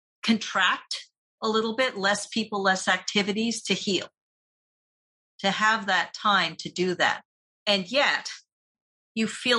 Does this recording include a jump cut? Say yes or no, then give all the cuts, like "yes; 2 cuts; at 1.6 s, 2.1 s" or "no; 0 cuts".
no; 0 cuts